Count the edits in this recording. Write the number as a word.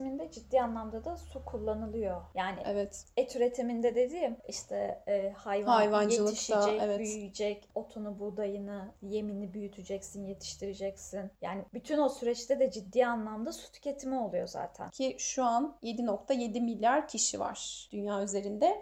two